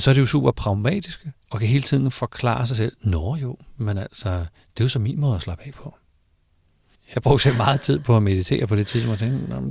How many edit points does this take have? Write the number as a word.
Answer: two